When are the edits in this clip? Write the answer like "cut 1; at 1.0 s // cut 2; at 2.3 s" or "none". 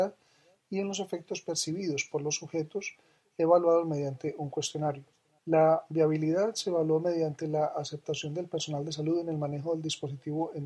cut 1; at 5.4 s